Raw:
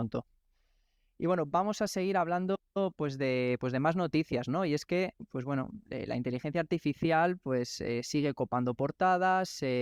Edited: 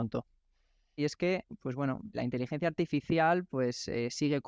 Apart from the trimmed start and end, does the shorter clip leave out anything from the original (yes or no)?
yes